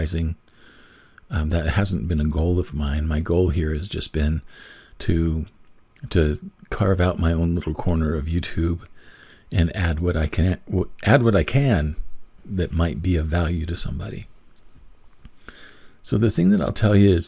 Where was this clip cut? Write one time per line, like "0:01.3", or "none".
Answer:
0:12.4